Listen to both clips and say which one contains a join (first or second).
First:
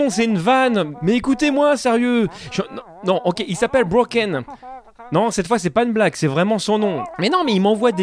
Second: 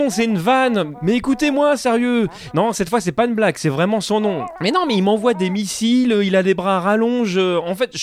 second